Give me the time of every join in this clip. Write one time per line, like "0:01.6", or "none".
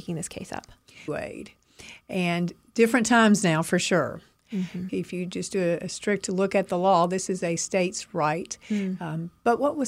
0:01.1
0:04.9